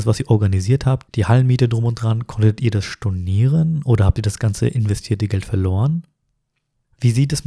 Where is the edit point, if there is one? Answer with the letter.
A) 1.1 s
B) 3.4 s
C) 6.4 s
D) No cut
A